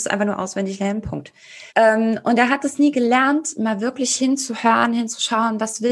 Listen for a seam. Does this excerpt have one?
yes; 1 cut; at 1.7 s

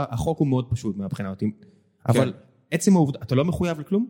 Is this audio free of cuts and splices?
no; 1 cut; at 1.6 s

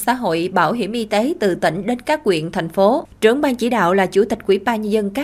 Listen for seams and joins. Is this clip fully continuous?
no; 1 cut; at 3.1 s

